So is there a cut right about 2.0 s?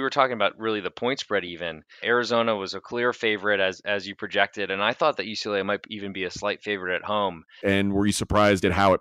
yes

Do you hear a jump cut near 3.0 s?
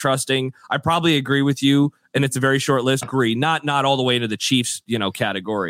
yes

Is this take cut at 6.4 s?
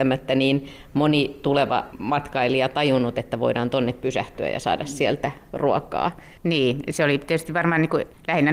yes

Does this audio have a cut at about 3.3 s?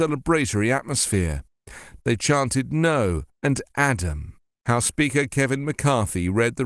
yes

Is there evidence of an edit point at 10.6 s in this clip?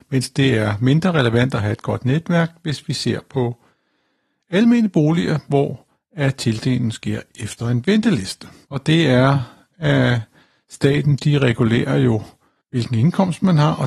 no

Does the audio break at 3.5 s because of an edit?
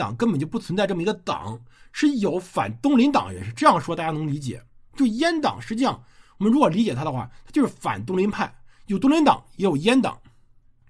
no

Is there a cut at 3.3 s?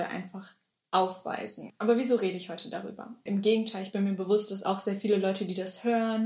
yes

